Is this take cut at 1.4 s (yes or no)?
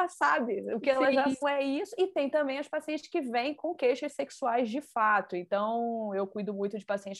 yes